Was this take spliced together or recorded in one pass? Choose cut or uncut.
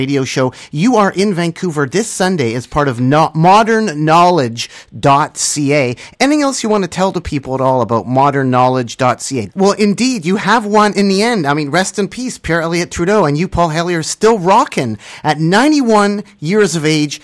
cut